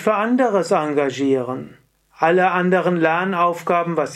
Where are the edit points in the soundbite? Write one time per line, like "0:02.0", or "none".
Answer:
0:01.9